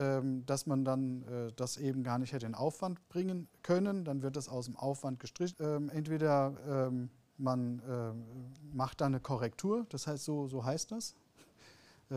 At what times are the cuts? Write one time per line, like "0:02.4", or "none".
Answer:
0:05.5